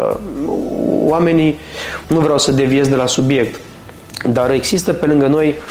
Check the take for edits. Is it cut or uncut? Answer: cut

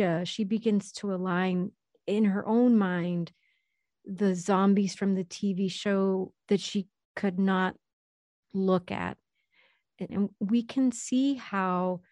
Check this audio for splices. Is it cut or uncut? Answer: cut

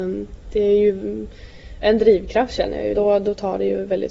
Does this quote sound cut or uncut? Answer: cut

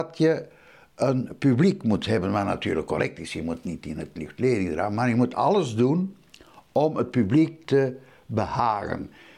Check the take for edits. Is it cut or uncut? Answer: uncut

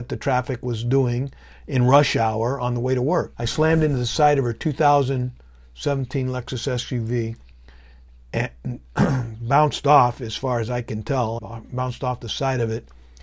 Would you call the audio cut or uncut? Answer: cut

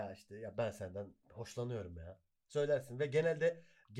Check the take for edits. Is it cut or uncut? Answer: cut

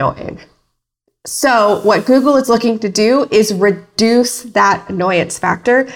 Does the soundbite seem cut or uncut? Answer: uncut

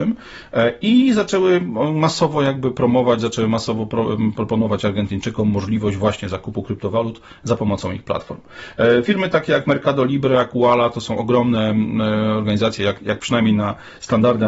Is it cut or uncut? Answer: uncut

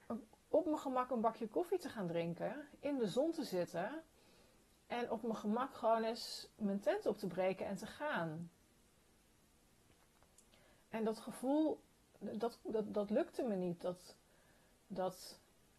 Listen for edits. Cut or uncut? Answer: uncut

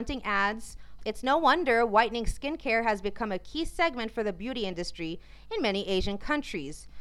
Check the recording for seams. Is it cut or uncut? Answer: cut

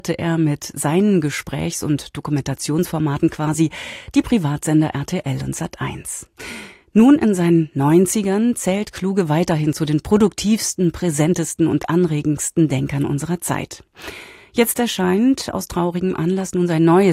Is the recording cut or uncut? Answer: uncut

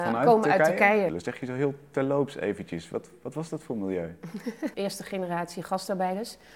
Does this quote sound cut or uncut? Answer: cut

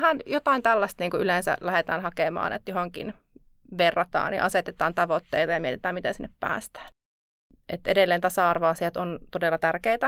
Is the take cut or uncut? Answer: uncut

